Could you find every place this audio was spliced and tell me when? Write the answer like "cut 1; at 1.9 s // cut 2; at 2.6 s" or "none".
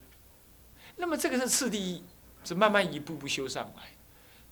none

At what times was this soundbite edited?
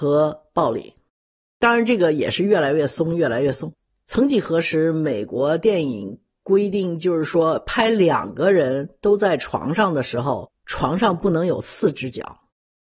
cut 1; at 10.6 s

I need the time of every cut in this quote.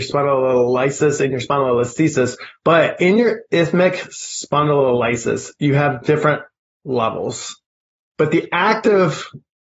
cut 1; at 8.0 s

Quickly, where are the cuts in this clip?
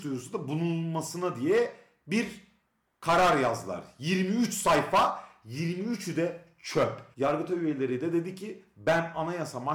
cut 1; at 7.1 s

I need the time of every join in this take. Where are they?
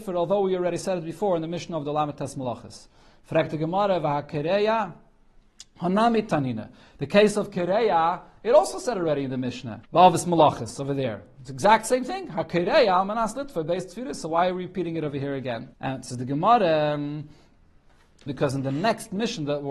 cut 1; at 9.9 s // cut 2; at 15.7 s // cut 3; at 18.3 s

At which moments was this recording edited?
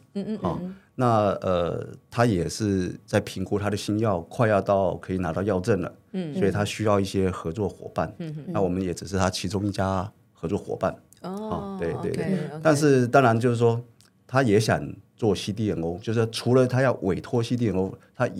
none

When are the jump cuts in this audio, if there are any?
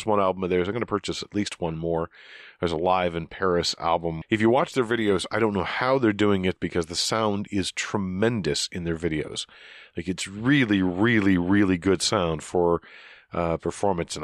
cut 1; at 4.2 s

